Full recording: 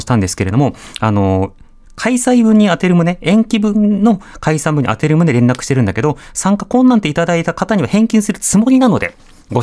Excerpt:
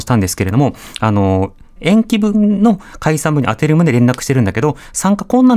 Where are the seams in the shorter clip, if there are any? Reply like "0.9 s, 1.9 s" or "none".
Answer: 1.8 s

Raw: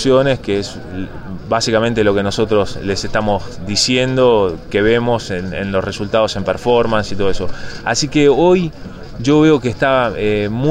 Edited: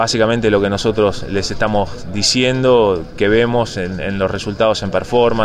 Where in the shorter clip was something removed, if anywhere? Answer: none

